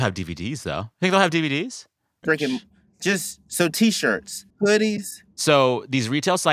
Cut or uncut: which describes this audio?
cut